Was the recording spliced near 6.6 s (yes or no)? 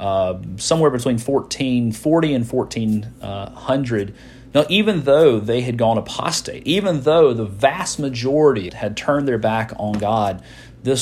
no